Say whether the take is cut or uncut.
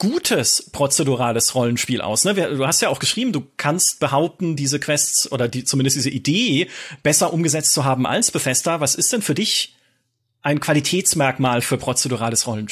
uncut